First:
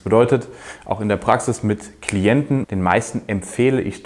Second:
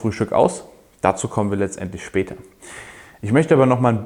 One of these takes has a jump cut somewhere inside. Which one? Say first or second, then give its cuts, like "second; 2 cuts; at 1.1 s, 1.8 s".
first; 1 cut; at 2.6 s